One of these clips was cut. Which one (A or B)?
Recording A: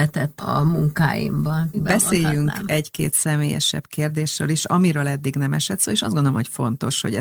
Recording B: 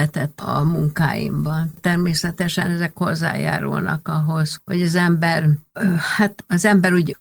A